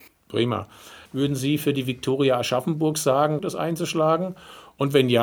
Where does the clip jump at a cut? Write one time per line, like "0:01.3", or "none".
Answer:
0:01.1
0:03.4